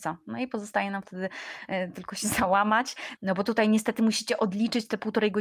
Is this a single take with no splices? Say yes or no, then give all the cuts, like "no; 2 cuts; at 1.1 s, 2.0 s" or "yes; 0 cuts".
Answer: no; 1 cut; at 3.2 s